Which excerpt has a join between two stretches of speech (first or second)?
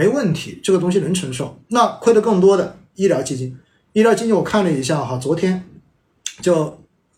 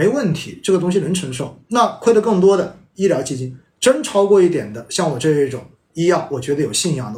second